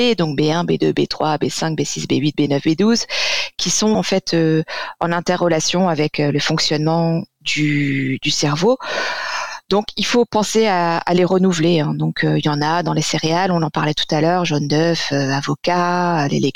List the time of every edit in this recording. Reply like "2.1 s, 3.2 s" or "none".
3.9 s